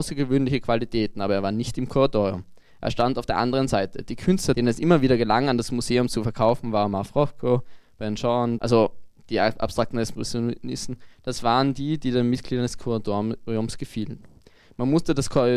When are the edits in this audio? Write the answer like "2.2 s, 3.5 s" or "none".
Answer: 8.6 s